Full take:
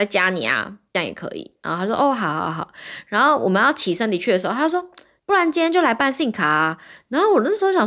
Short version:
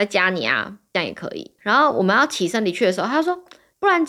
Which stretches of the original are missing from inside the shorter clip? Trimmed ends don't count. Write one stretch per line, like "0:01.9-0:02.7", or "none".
0:01.6-0:03.0